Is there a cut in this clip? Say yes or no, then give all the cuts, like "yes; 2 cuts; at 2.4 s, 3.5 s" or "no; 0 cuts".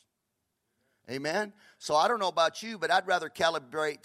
no; 0 cuts